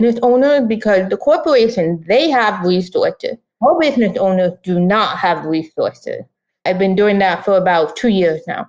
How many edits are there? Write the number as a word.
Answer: one